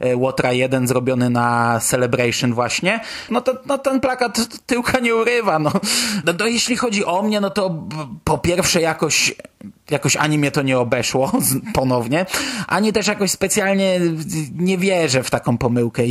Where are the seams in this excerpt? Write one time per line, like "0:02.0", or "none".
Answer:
0:03.3
0:06.2